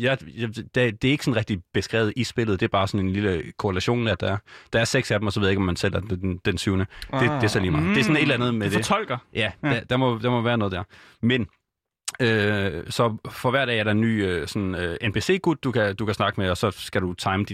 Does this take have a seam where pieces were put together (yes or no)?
no